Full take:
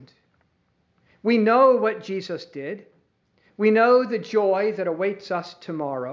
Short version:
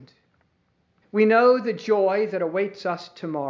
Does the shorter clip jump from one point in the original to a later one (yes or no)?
yes